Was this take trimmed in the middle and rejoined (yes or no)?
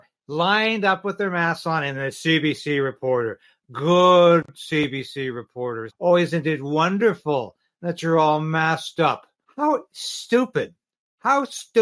yes